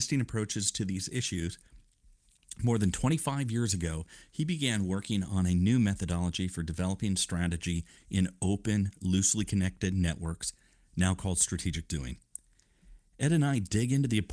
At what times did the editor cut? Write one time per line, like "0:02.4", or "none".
none